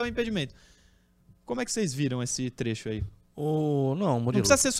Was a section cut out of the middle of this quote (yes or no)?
no